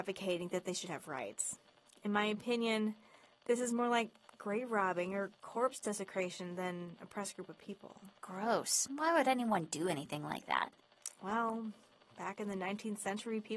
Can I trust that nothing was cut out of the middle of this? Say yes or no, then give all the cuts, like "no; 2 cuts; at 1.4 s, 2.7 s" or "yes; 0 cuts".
yes; 0 cuts